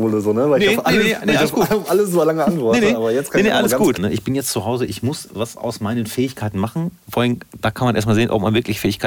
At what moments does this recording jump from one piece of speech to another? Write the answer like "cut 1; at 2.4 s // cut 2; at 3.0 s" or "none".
cut 1; at 4.0 s